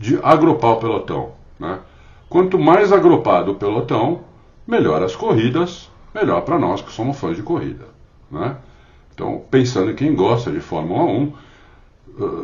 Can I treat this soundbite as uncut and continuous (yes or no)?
yes